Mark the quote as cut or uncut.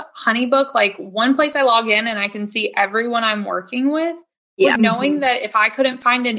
cut